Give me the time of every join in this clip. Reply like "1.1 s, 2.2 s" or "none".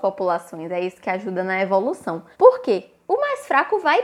2.3 s